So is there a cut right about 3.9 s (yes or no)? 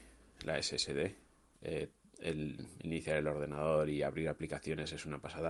no